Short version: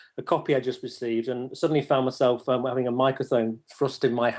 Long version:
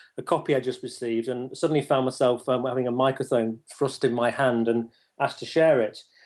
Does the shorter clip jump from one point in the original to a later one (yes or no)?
no